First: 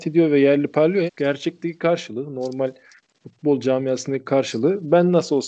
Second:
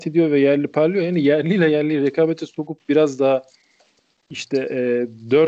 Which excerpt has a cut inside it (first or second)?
first